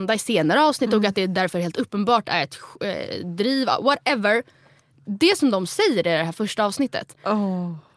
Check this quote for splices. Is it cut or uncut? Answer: uncut